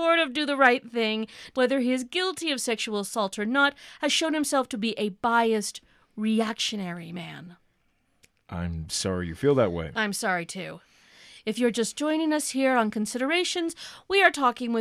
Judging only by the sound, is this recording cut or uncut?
cut